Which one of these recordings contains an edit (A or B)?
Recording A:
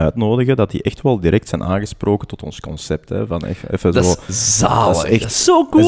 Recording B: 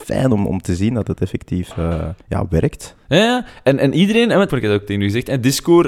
B